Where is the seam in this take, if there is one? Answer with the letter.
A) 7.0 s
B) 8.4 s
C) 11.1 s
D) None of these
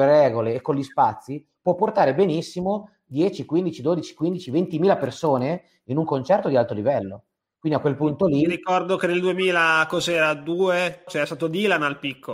C